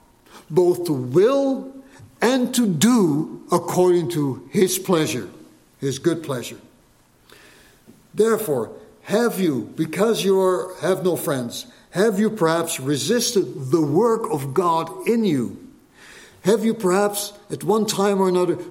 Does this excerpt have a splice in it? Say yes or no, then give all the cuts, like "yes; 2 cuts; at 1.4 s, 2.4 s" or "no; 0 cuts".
no; 0 cuts